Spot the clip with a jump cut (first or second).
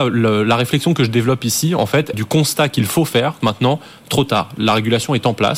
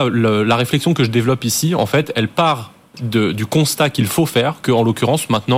first